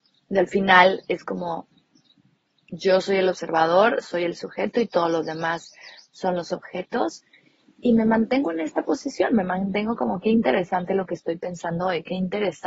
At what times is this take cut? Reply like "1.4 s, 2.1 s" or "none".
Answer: none

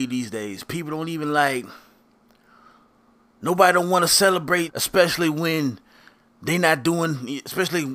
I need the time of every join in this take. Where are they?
4.7 s

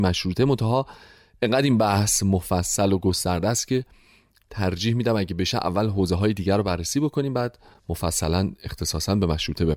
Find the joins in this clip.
none

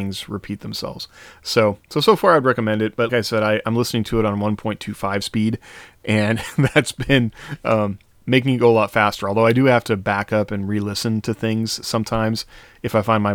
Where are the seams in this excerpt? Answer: 3.1 s

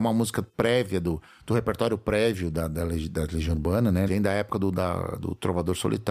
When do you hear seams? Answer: 4.1 s

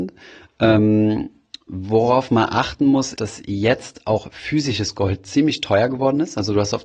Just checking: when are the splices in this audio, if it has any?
3.2 s

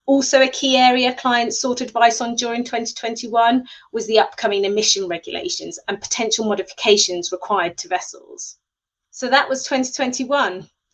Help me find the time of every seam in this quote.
none

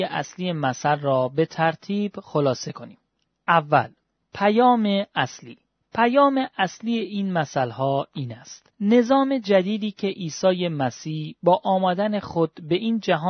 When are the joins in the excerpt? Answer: none

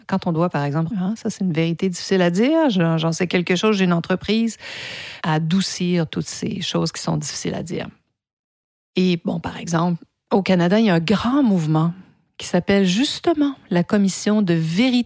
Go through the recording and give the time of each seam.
0.9 s, 5.2 s

